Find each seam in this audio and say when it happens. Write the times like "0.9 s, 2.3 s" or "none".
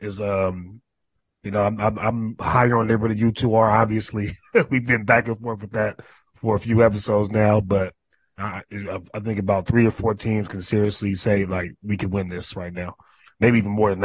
8.4 s